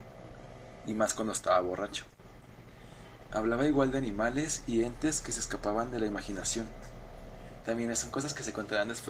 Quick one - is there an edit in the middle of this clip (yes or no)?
yes